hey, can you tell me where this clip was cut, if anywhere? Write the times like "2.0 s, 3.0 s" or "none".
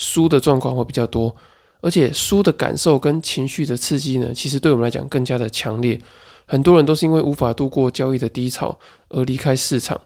none